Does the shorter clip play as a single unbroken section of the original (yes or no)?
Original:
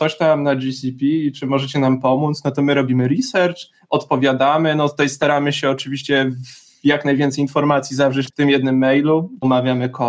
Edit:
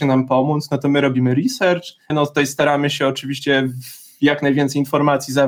no